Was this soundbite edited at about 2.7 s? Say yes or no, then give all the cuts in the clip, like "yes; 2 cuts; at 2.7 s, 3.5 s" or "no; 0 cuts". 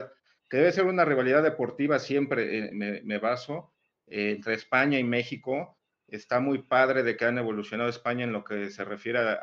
yes; 1 cut; at 2.7 s